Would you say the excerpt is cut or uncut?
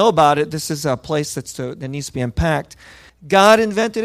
cut